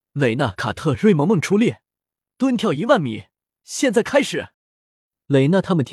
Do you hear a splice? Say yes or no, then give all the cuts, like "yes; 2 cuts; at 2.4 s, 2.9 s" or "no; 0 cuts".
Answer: yes; 1 cut; at 4.5 s